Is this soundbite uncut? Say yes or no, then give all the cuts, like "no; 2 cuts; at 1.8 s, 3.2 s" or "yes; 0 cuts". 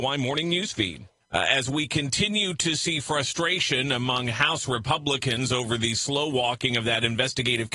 yes; 0 cuts